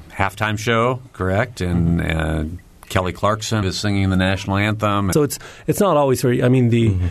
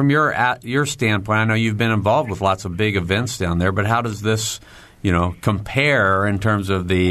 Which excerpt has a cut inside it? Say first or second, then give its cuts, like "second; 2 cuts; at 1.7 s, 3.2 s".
first; 2 cuts; at 3.6 s, 5.1 s